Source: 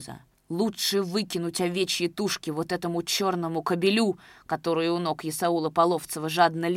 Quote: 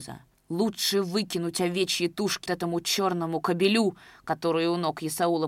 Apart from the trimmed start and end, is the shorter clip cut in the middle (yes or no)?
yes